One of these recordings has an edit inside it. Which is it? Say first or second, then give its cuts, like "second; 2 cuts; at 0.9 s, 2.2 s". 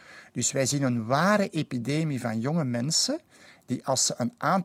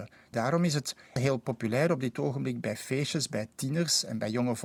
second; 1 cut; at 1.2 s